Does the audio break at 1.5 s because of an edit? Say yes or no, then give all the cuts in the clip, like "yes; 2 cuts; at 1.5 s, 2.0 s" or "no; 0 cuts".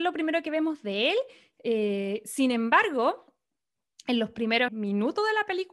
no; 1 cut; at 4.7 s